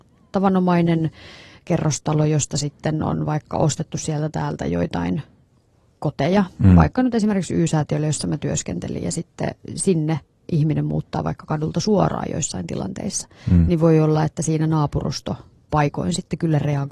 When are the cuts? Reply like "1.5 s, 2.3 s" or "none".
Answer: none